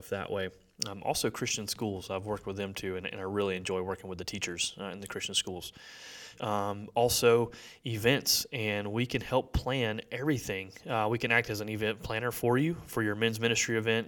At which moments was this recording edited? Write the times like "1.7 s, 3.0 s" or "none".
6.3 s